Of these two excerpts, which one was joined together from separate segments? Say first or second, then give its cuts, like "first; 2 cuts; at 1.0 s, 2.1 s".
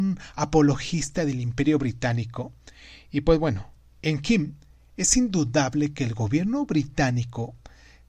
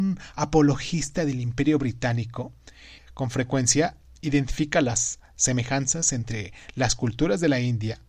second; 1 cut; at 3.0 s